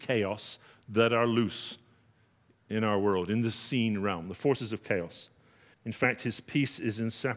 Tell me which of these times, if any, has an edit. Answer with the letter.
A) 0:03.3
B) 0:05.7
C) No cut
B